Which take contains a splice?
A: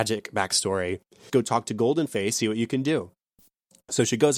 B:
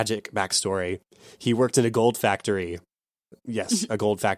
A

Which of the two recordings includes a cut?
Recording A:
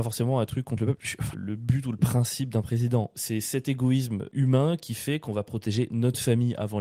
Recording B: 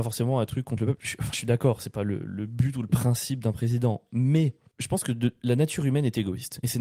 A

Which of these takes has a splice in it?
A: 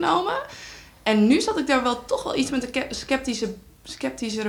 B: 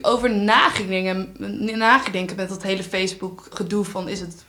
B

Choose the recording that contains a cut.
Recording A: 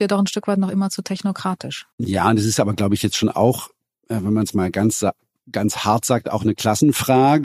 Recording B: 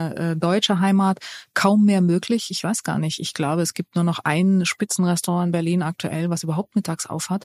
A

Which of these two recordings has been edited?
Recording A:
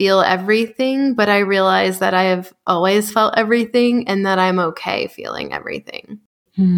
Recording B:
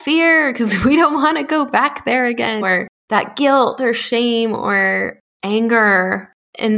B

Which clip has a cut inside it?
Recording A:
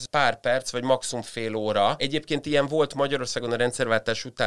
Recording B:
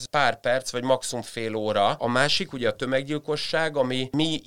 B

